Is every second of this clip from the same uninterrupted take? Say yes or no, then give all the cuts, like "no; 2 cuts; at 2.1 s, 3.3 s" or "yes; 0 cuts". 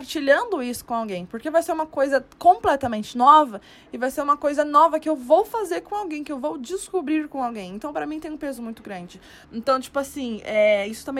no; 1 cut; at 9.4 s